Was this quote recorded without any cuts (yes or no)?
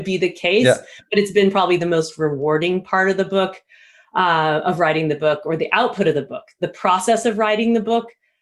yes